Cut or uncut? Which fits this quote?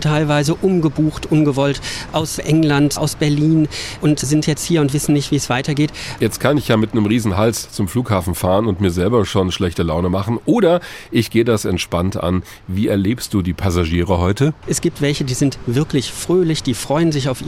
cut